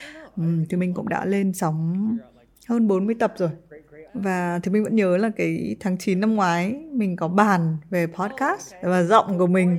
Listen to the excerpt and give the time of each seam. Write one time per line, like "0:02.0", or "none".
0:04.1